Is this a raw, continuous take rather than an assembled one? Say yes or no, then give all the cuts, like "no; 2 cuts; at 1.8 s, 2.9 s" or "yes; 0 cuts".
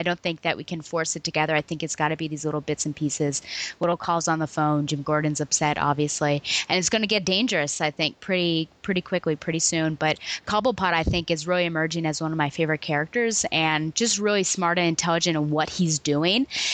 yes; 0 cuts